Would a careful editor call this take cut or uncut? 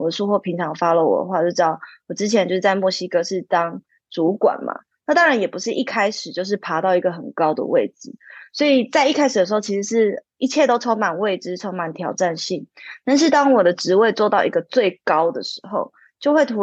uncut